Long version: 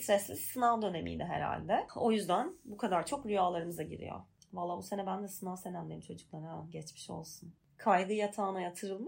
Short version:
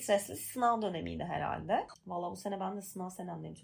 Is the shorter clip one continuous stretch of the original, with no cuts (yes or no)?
no